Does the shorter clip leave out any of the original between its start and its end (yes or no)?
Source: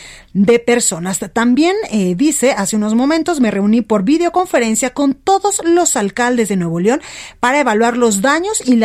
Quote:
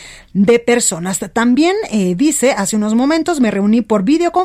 no